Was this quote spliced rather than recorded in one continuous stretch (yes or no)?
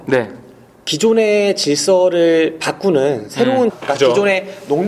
yes